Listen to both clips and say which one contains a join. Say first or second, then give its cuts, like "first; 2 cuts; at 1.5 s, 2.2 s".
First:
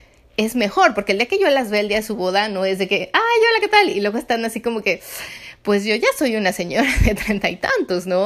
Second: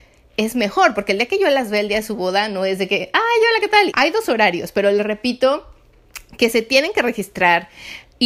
second; 1 cut; at 3.9 s